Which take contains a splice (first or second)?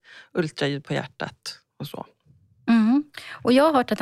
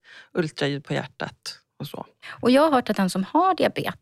second